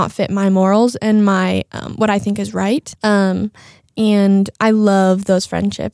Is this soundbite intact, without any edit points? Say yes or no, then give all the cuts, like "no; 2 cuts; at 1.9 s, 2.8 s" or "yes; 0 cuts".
no; 1 cut; at 2.9 s